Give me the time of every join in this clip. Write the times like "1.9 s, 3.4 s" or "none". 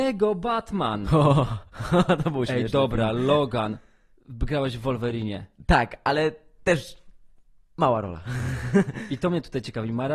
none